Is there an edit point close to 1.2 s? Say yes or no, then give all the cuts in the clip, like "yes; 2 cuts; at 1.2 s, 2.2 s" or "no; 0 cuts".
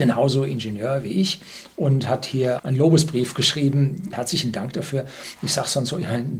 no; 3 cuts; at 2.6 s, 4.1 s, 5.4 s